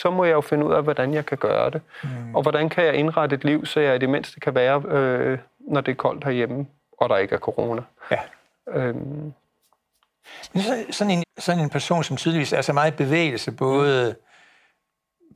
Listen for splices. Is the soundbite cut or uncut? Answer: cut